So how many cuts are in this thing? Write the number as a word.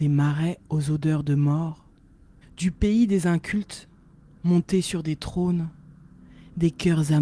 one